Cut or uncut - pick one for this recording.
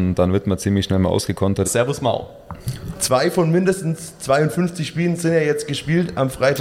cut